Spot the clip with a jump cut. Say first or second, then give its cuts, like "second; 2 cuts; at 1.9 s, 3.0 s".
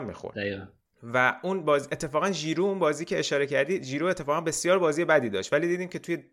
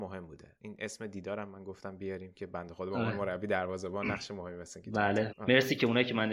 second; 1 cut; at 5.3 s